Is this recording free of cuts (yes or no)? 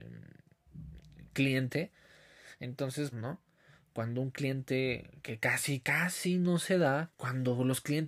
no